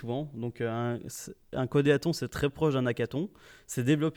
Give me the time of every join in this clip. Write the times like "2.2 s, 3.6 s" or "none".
none

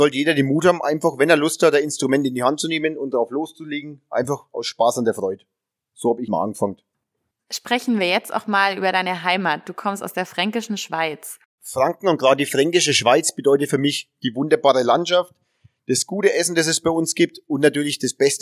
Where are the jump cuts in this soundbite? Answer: 6.3 s, 11.6 s

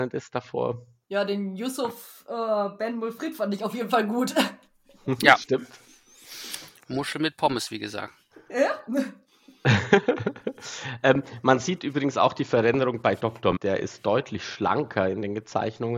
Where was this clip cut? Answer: 13.6 s

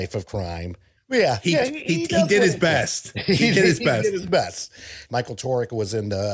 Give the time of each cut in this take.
1.0 s, 5.1 s

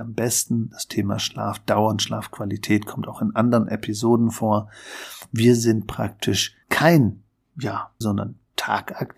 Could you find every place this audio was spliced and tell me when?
6.6 s, 8.0 s

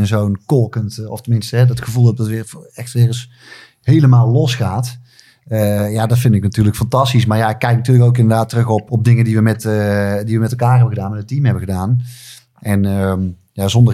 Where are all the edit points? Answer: 8.9 s

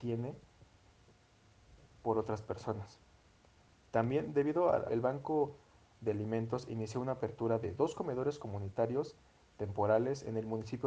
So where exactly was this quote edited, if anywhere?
4.9 s

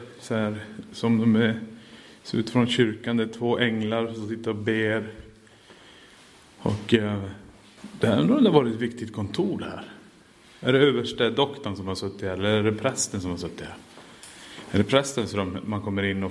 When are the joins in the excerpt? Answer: none

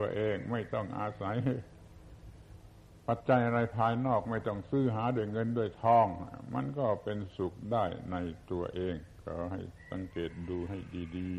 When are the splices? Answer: 3.2 s

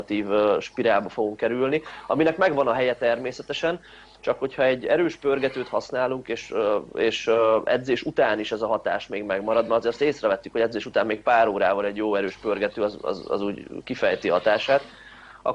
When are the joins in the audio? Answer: none

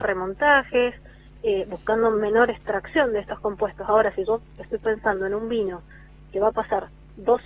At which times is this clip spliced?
none

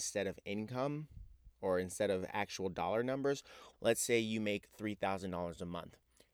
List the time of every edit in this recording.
3.7 s

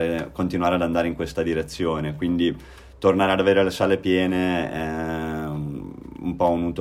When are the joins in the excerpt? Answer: none

